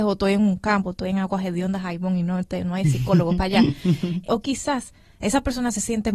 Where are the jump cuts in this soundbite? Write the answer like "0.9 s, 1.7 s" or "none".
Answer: 4.2 s